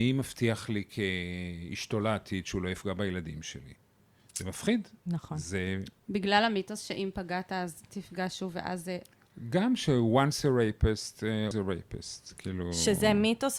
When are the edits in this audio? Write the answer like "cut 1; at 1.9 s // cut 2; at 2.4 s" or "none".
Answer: cut 1; at 11.5 s